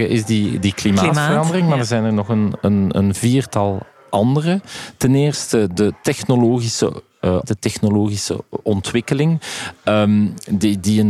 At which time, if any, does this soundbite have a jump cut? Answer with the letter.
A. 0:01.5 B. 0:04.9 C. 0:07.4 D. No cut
C